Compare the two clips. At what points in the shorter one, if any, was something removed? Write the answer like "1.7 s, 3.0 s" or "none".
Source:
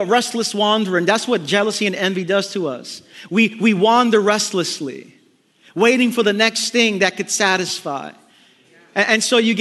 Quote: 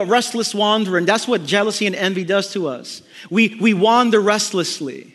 none